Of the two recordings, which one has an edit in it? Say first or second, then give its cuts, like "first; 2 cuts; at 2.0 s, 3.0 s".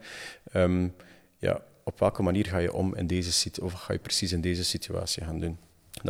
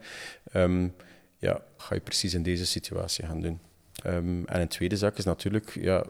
second; 2 cuts; at 1.8 s, 4.0 s